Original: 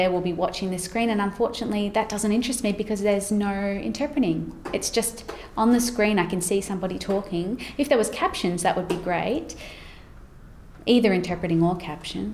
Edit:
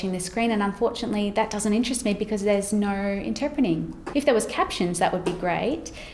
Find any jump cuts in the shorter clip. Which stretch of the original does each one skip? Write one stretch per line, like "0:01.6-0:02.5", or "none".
0:04.7-0:07.8